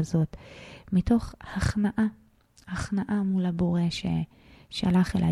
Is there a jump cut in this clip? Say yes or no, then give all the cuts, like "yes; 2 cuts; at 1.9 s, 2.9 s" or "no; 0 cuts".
no; 0 cuts